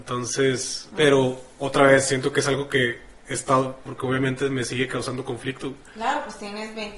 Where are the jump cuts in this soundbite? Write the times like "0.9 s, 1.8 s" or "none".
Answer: 0.9 s, 3.9 s